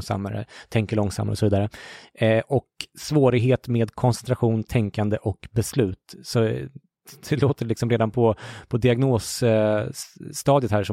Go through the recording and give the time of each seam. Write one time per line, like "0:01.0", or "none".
none